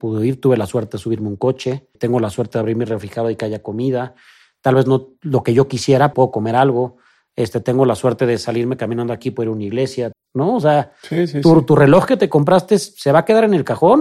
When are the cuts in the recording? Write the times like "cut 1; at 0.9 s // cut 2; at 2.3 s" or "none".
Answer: cut 1; at 1.9 s // cut 2; at 6.1 s // cut 3; at 10.1 s

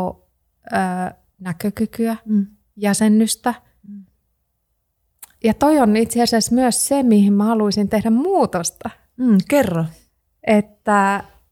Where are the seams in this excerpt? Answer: none

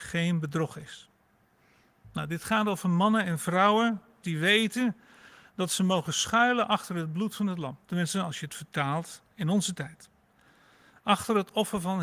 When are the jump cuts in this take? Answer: cut 1; at 4.2 s // cut 2; at 7.8 s

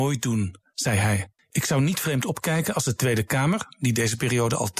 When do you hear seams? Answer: cut 1; at 1.4 s

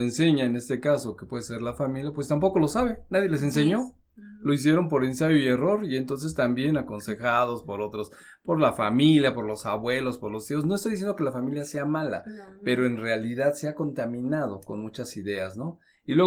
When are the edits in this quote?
none

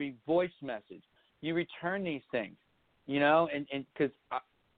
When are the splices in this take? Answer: none

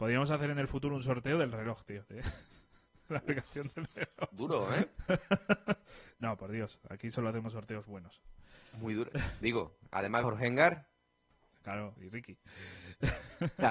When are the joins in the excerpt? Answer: cut 1; at 10.2 s // cut 2; at 12.0 s

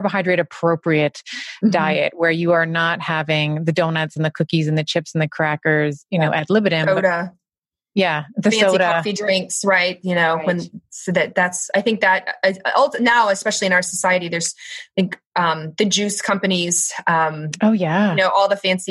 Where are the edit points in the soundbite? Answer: none

